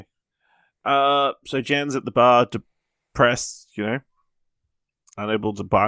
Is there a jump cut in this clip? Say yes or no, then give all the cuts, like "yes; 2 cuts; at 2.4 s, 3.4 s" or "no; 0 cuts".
no; 0 cuts